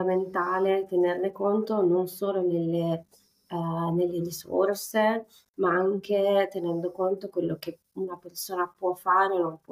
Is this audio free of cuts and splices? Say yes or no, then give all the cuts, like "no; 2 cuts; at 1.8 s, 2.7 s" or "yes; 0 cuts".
yes; 0 cuts